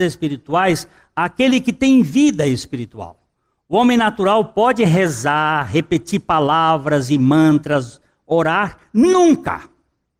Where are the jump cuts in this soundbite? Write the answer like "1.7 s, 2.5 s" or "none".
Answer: none

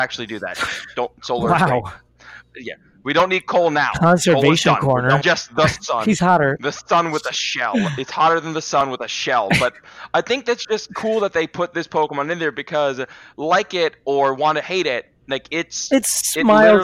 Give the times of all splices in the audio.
5.2 s

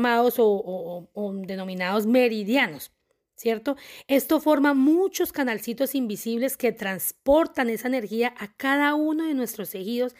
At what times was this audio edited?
none

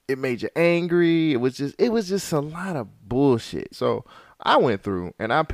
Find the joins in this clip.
3.7 s

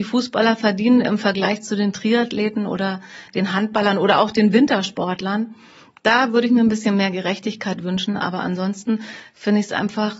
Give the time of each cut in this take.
none

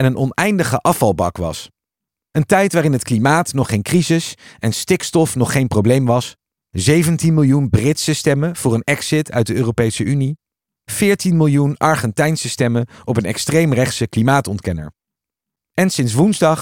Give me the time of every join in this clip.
6.6 s

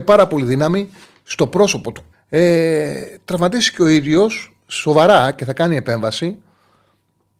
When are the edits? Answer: 2.1 s

